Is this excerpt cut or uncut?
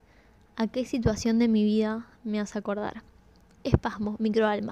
cut